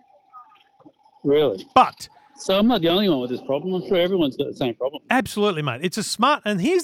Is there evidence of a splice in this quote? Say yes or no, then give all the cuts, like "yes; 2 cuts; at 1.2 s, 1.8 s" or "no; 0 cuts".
no; 0 cuts